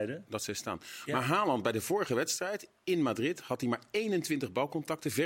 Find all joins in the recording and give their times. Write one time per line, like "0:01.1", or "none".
none